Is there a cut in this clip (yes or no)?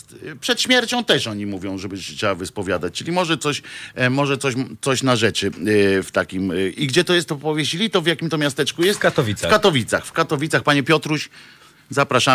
no